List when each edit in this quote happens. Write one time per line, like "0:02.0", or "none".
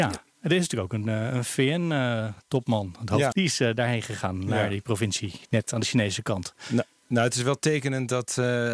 0:03.3